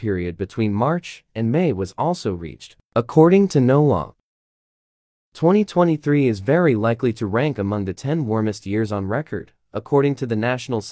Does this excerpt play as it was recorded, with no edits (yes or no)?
yes